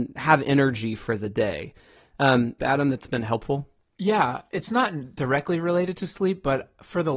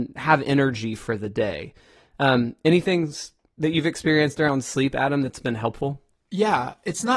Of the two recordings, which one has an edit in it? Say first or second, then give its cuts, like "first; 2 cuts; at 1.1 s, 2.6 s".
first; 1 cut; at 2.6 s